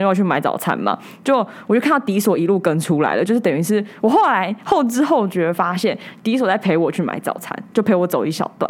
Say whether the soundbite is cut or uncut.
uncut